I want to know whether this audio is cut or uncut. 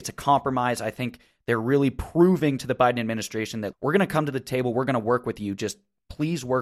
cut